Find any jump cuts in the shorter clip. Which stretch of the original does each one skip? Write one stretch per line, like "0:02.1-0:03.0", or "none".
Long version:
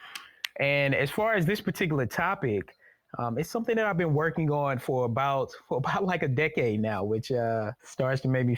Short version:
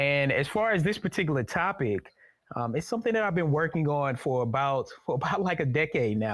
none